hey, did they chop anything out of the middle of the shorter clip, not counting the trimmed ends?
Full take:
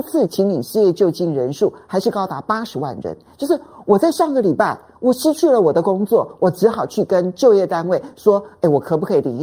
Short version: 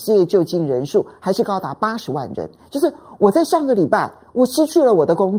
no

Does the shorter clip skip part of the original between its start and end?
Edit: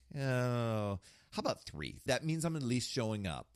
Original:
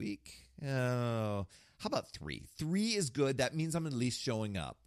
yes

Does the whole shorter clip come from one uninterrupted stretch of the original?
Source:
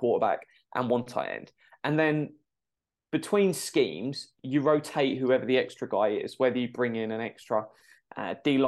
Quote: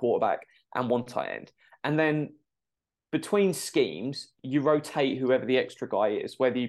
yes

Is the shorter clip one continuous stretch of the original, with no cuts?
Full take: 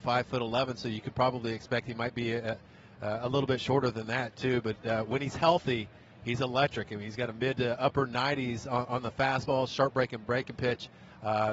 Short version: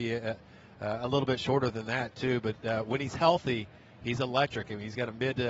yes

